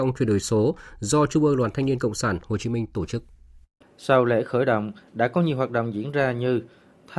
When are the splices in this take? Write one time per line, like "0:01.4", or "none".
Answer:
0:03.8

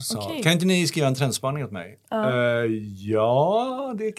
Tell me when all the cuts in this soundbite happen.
none

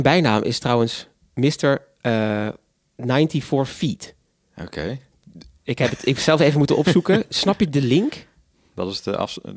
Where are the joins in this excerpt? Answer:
none

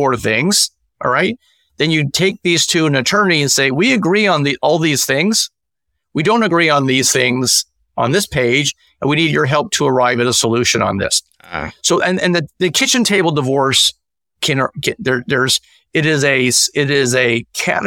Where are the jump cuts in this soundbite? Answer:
none

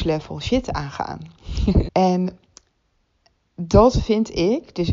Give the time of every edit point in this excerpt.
0:01.9

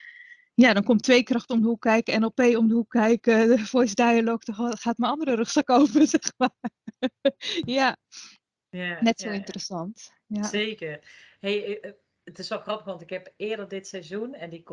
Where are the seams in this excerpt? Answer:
none

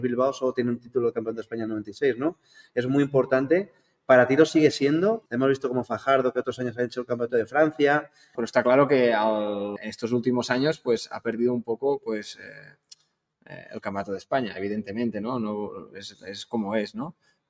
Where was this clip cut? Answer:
0:05.3
0:08.3
0:09.8

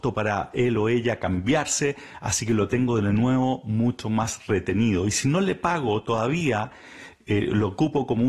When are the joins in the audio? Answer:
none

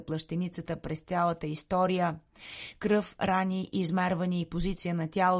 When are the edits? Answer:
none

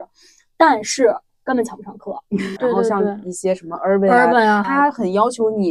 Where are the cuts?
0:02.6
0:04.6

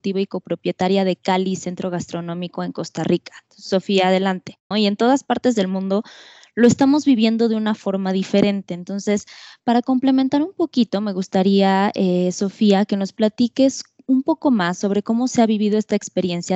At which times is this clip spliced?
0:04.7

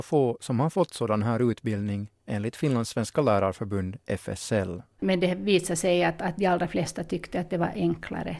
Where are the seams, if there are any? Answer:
0:05.0

